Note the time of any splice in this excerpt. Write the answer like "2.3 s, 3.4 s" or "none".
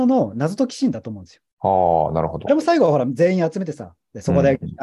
none